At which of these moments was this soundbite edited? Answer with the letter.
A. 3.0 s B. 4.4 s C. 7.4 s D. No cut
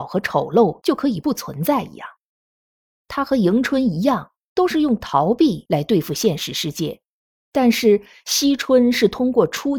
A